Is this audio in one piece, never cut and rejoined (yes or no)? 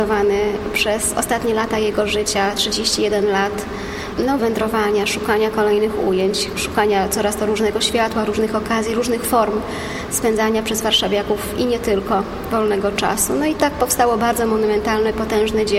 no